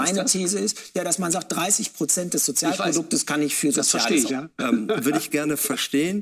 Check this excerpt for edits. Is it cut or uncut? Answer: cut